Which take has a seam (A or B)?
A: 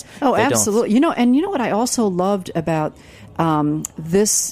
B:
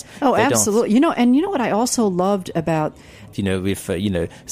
B